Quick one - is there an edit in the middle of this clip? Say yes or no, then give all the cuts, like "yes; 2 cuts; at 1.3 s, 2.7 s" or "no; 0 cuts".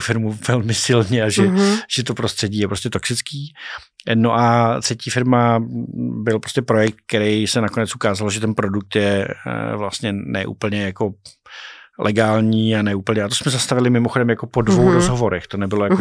no; 0 cuts